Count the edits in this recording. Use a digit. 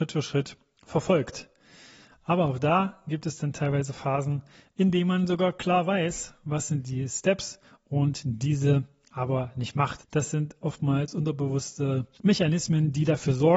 2